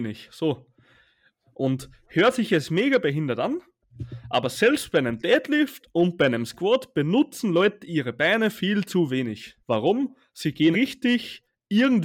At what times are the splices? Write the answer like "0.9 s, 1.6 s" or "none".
9.6 s, 10.7 s